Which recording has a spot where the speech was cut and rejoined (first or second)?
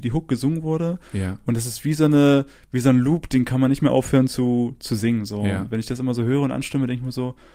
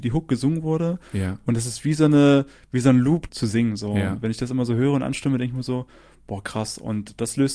second